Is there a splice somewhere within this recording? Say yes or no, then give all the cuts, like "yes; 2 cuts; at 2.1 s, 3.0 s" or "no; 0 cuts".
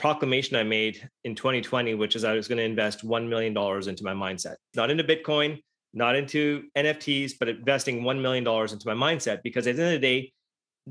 yes; 1 cut; at 4.7 s